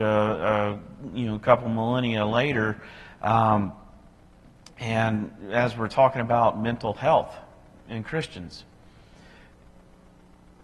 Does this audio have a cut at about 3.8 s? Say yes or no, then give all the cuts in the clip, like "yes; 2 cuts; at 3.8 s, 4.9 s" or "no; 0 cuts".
no; 0 cuts